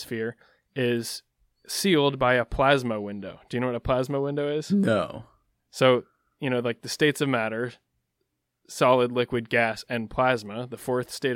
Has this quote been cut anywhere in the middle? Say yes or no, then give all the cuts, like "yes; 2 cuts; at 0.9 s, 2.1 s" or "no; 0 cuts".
no; 0 cuts